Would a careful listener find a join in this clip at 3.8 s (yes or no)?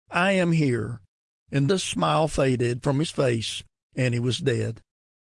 no